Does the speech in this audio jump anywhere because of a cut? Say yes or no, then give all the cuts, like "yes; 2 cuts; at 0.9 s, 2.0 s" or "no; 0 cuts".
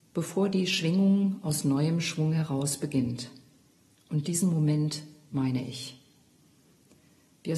no; 0 cuts